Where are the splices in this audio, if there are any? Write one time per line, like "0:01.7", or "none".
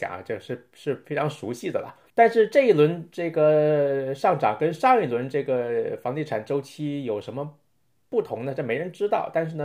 0:02.1